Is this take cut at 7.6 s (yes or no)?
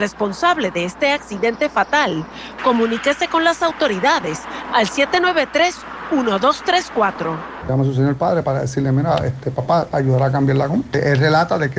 yes